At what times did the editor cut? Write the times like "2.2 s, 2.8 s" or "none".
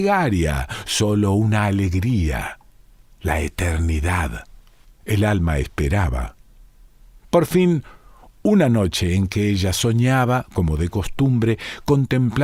4.8 s